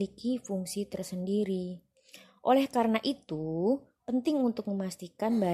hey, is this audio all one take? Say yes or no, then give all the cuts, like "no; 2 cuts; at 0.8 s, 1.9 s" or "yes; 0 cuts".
yes; 0 cuts